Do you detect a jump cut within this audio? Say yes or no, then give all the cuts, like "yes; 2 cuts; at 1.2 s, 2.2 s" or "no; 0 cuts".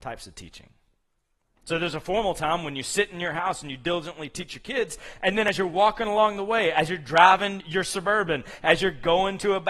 no; 0 cuts